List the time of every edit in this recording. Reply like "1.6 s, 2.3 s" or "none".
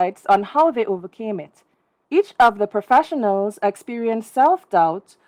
2.0 s